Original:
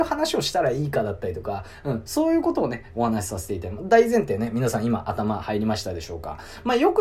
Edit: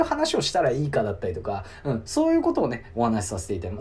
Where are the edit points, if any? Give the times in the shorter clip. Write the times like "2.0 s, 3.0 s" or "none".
none